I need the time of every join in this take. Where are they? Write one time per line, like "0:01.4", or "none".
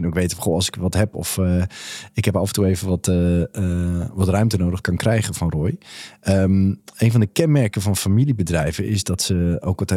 0:04.8